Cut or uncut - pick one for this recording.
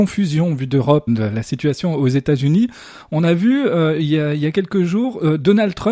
cut